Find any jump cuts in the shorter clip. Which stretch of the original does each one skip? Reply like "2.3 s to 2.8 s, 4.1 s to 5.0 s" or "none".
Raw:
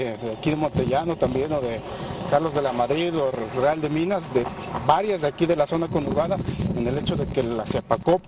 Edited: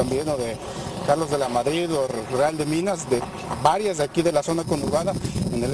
none